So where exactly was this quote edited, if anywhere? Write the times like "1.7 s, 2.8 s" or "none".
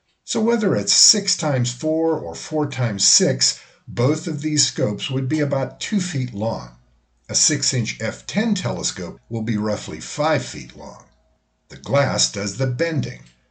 9.2 s, 11.6 s